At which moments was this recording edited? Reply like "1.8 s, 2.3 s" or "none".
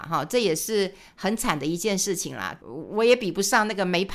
2.6 s